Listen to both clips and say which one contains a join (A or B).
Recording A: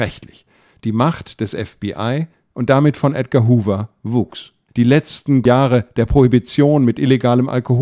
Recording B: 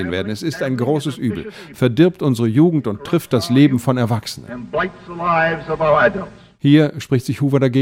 A